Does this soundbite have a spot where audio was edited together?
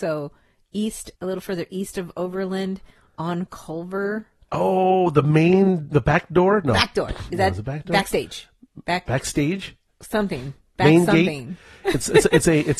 yes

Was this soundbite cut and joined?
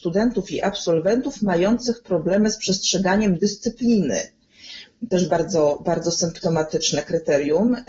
no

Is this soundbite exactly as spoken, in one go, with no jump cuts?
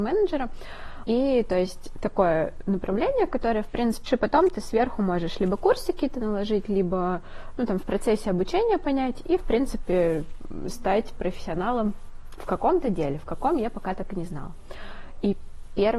no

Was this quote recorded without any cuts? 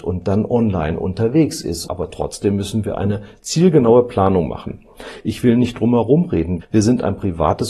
no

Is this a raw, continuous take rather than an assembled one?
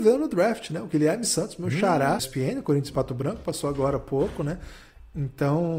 no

